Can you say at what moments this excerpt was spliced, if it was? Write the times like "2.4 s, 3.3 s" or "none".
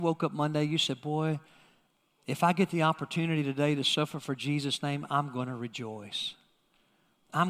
none